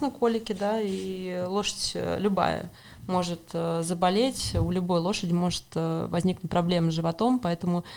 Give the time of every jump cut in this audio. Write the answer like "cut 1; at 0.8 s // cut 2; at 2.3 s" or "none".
none